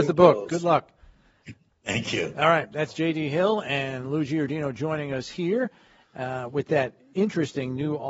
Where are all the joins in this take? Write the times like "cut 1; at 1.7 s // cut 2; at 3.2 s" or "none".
none